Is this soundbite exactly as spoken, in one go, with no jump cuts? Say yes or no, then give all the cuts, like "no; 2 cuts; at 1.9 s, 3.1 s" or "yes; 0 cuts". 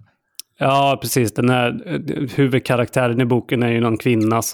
yes; 0 cuts